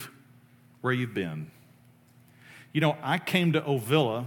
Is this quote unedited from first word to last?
yes; 0 cuts

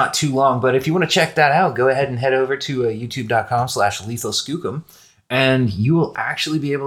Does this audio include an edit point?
no; 0 cuts

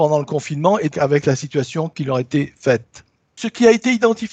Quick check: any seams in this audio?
yes; 1 cut; at 0.9 s

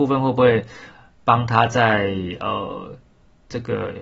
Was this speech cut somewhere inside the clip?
no; 0 cuts

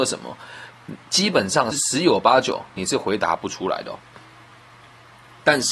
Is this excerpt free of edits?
no; 1 cut; at 1.7 s

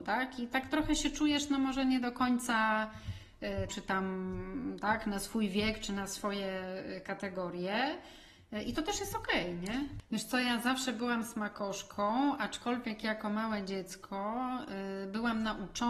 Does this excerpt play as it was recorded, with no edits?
no; 2 cuts; at 3.7 s, 10.0 s

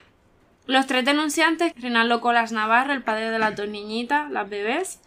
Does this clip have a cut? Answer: yes; 1 cut; at 1.7 s

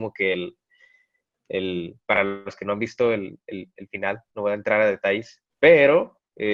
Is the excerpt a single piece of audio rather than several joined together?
no; 1 cut; at 5.5 s

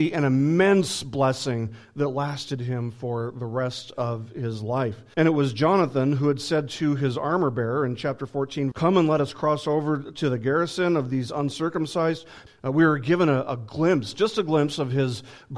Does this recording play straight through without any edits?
no; 3 cuts; at 5.1 s, 8.7 s, 12.5 s

